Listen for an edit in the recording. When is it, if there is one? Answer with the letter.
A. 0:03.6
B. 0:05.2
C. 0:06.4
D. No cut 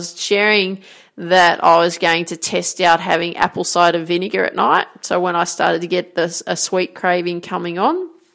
D